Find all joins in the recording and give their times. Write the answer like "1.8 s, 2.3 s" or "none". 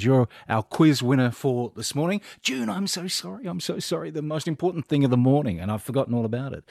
none

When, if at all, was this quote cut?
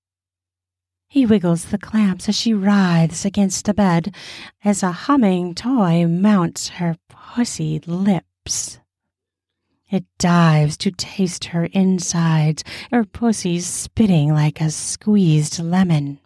12.9 s

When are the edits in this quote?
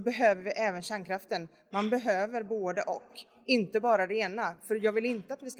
none

